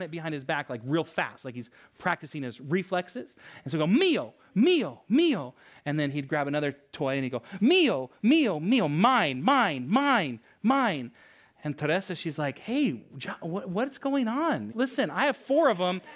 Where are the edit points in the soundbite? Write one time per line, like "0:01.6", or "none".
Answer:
0:14.7

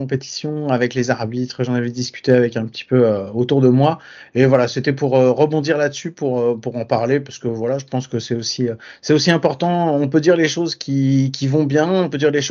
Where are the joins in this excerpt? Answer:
none

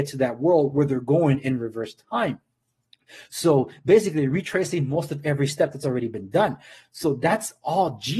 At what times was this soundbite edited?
none

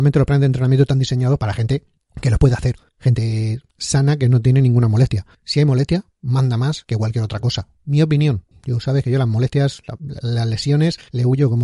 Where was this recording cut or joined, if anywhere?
none

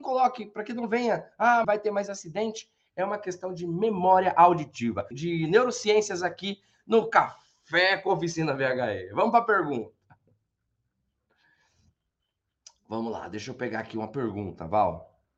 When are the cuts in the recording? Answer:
0:01.6
0:05.1

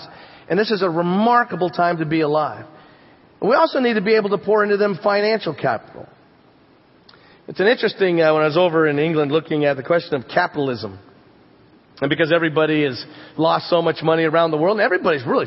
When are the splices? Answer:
none

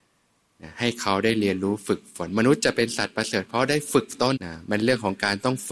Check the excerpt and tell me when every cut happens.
0:04.4

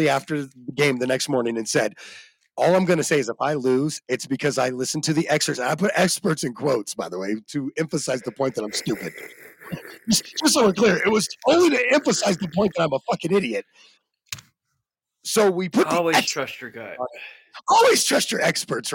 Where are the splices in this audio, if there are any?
none

